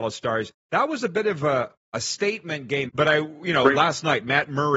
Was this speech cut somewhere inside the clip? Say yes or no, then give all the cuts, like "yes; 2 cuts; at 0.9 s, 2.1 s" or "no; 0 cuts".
yes; 1 cut; at 2.9 s